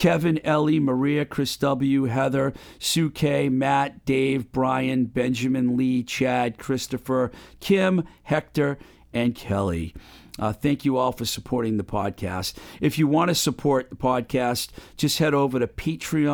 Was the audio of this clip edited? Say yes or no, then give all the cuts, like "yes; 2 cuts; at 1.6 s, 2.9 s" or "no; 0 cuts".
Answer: no; 0 cuts